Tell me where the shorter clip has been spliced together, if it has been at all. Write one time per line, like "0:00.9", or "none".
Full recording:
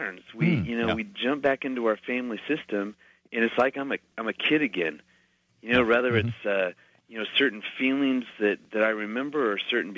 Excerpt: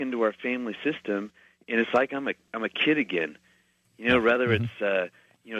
none